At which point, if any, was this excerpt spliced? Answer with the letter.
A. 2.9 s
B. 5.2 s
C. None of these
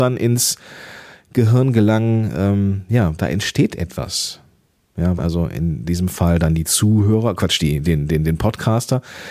B